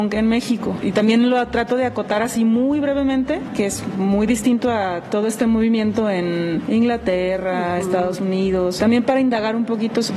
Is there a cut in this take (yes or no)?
yes